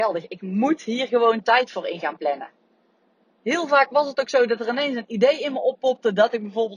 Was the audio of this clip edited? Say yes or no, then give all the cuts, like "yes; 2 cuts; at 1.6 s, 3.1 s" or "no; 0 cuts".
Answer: no; 0 cuts